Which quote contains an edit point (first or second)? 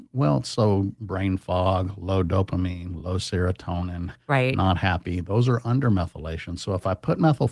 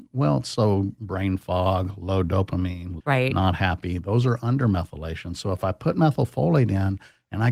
second